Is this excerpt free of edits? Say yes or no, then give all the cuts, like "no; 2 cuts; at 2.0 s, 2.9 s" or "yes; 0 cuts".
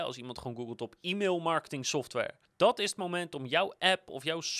no; 1 cut; at 2.4 s